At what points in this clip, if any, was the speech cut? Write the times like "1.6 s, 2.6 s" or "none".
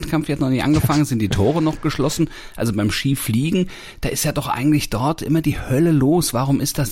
none